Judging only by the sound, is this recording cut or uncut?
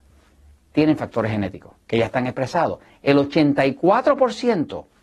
cut